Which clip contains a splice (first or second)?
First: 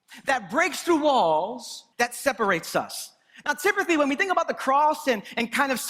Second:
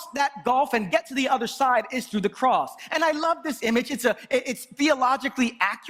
first